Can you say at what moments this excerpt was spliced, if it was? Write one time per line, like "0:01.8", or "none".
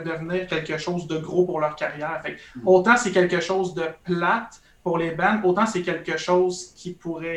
none